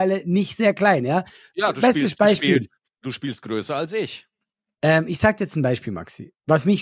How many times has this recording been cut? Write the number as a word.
zero